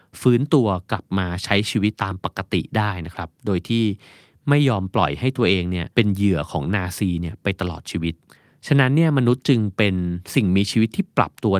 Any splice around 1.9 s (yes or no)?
yes